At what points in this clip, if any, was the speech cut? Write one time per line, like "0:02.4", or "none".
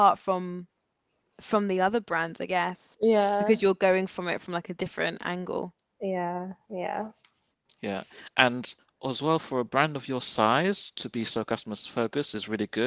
none